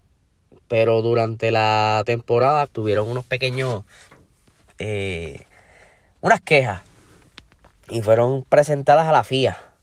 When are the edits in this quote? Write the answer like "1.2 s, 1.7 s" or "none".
2.7 s